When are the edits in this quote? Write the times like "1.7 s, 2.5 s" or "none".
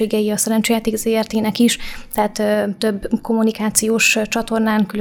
none